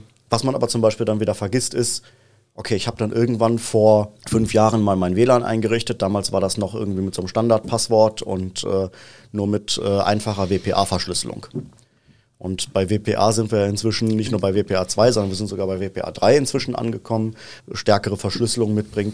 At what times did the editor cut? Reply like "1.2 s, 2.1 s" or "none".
4.2 s, 17.6 s